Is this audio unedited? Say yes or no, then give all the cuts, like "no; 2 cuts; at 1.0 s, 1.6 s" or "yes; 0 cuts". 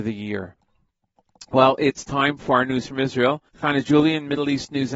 no; 1 cut; at 3.5 s